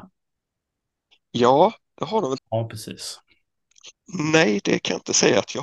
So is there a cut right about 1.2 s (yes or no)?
no